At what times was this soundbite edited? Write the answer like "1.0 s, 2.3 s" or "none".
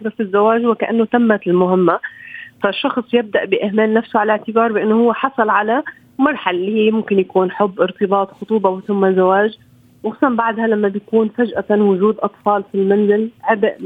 none

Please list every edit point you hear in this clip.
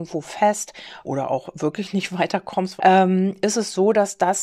1.0 s, 2.8 s

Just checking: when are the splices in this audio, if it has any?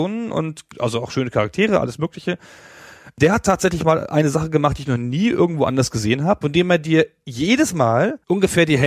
6.4 s

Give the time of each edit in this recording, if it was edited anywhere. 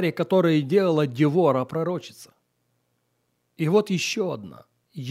none

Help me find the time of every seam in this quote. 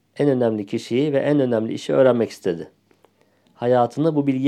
none

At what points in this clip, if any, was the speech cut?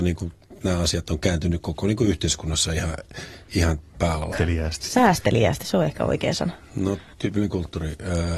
4.3 s, 7.1 s

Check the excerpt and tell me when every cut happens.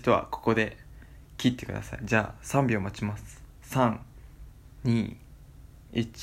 none

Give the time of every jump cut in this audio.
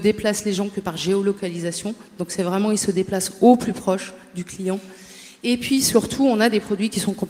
none

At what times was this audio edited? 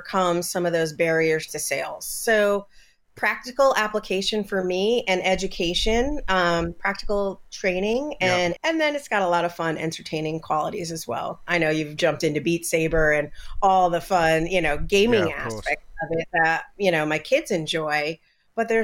8.6 s

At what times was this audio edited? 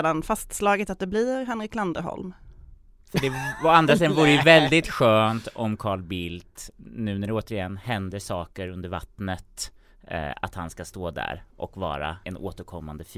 12.2 s

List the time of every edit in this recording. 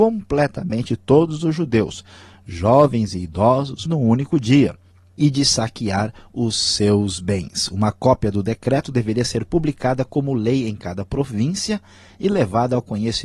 3.9 s

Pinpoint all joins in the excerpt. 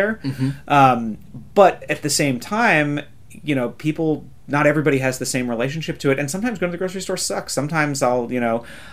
none

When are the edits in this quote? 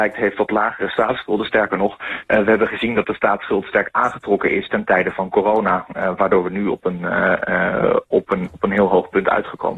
none

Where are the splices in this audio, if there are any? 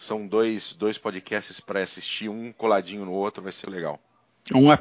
3.6 s

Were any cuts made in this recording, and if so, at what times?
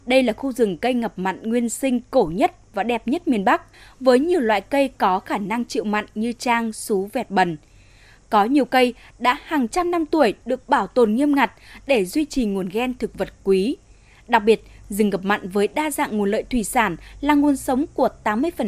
none

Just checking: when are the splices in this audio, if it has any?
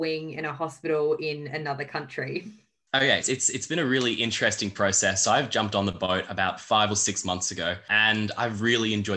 3.2 s

